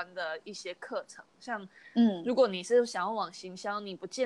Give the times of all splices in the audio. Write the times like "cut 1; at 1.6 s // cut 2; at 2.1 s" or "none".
none